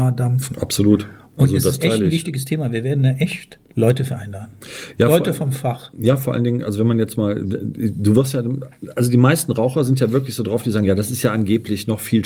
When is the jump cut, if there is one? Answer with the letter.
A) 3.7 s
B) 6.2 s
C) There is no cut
A